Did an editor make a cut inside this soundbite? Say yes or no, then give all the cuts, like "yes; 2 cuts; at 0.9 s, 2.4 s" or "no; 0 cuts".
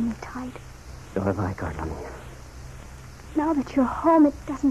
no; 0 cuts